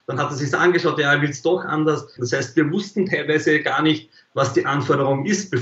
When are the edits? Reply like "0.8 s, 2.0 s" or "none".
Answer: 2.2 s